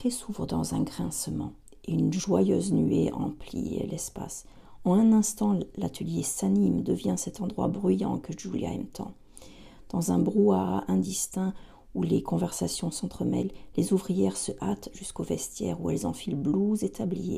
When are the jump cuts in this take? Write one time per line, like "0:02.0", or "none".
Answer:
none